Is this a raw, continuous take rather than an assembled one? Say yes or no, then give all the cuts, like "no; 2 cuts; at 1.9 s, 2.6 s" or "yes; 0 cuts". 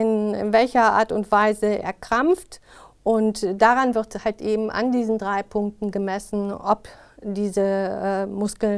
yes; 0 cuts